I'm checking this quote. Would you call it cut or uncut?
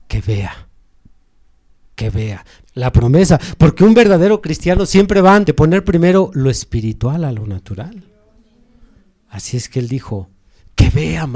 cut